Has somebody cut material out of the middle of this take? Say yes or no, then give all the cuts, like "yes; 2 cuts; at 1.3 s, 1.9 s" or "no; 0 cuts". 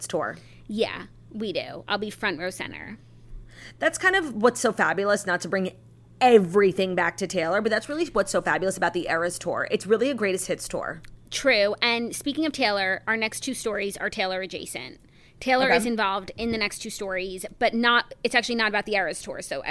no; 0 cuts